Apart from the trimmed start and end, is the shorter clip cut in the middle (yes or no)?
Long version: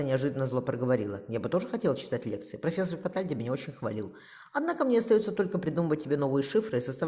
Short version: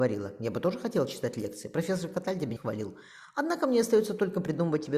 yes